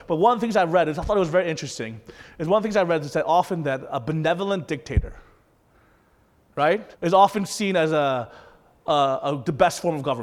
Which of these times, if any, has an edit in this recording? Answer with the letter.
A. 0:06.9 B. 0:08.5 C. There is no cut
A